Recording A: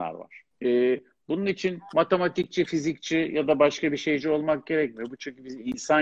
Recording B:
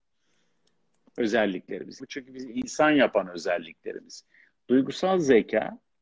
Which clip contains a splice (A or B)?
B